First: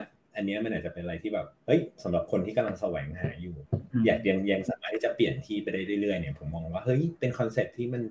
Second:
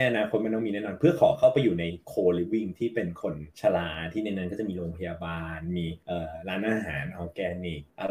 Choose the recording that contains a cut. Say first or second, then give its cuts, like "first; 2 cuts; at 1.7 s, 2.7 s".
second; 1 cut; at 3.5 s